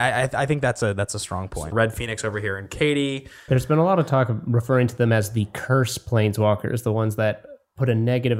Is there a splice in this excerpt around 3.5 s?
yes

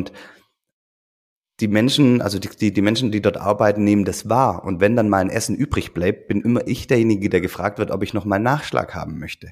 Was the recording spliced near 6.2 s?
no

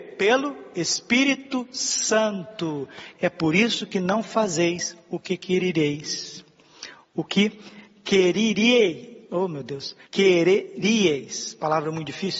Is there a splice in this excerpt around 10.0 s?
yes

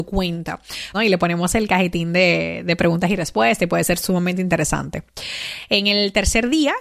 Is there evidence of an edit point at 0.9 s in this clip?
yes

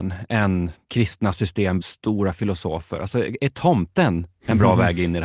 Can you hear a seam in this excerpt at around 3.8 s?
no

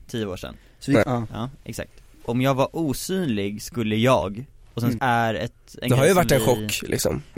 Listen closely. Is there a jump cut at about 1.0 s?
yes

